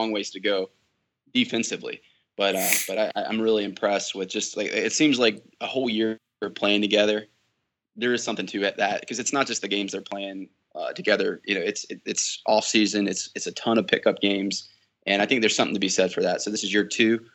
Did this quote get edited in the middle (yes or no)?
no